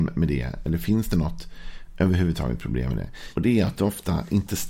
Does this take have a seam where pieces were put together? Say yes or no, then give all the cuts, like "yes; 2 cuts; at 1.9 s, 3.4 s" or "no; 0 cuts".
yes; 1 cut; at 3.3 s